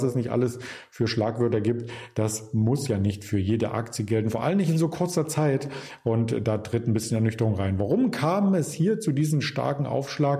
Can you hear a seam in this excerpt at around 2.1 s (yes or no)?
no